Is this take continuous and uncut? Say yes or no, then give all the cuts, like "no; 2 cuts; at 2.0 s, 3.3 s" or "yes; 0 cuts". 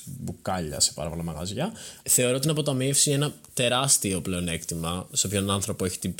no; 1 cut; at 2.0 s